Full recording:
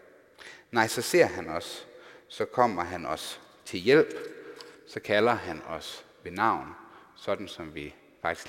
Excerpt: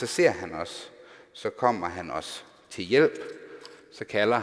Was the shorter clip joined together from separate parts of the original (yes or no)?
no